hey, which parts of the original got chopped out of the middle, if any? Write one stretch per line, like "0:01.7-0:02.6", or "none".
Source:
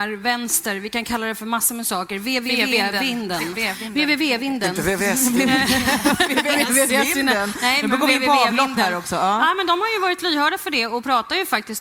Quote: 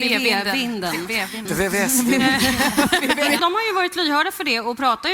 0:03.9-0:04.7
0:06.7-0:09.7